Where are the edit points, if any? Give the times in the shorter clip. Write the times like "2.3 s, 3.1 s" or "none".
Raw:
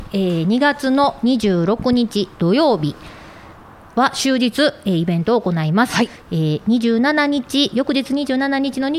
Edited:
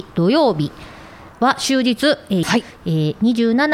1.3 s, 2.4 s